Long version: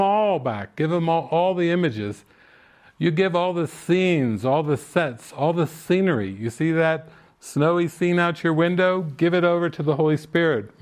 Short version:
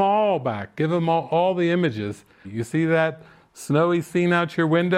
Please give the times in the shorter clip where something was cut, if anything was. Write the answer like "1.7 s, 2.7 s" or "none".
2.4 s